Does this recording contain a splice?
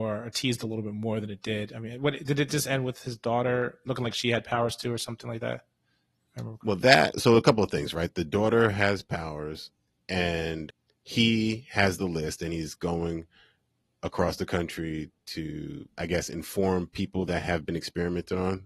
no; 0 cuts

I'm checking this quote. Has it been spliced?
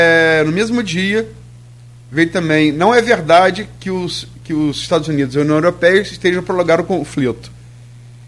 no; 0 cuts

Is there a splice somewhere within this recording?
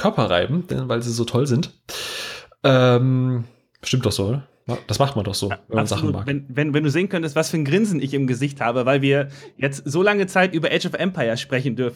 no; 0 cuts

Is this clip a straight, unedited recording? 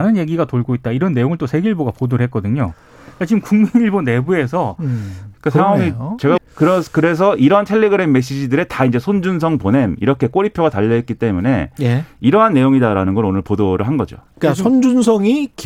no; 2 cuts; at 5.3 s, 6.4 s

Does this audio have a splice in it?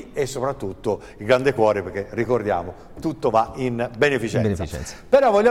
no; 0 cuts

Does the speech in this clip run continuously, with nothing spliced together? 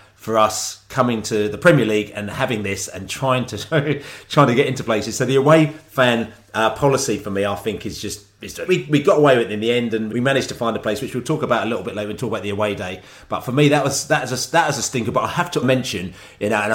no; 3 cuts; at 8.7 s, 10.1 s, 15.6 s

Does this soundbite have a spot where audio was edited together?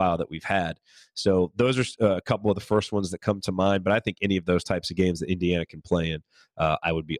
no; 0 cuts

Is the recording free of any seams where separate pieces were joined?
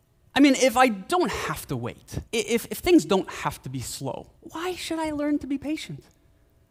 no; 2 cuts; at 2.3 s, 4.4 s

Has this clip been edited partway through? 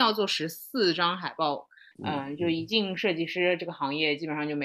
yes; 1 cut; at 1.9 s

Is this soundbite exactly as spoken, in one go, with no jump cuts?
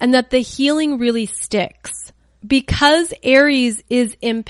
yes; 0 cuts

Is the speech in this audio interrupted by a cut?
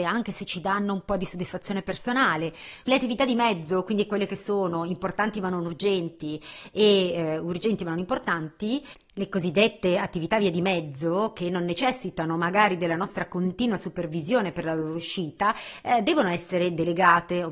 yes; 1 cut; at 2.8 s

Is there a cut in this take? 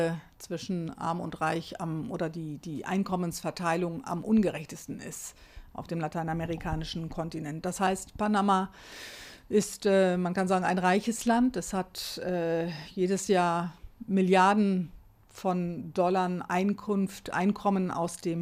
no; 0 cuts

